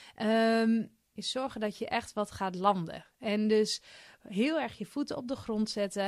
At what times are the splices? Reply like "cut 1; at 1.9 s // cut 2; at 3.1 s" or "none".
cut 1; at 1.1 s